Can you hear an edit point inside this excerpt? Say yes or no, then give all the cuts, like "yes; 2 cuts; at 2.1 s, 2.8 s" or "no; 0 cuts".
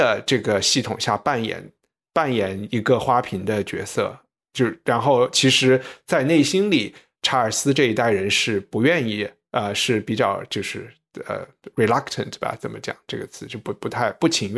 no; 0 cuts